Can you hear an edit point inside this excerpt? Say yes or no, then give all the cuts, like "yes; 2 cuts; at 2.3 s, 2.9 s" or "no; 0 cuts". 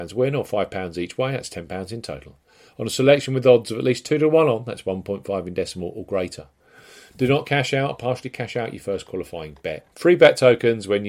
yes; 1 cut; at 9.9 s